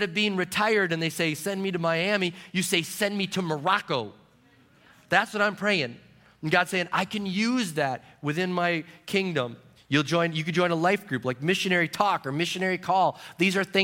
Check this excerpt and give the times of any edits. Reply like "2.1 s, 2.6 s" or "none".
9.8 s